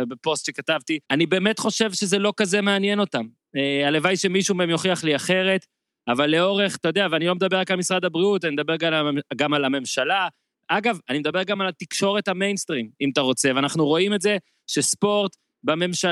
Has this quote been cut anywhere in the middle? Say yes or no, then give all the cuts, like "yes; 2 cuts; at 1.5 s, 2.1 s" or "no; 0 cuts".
yes; 1 cut; at 1.0 s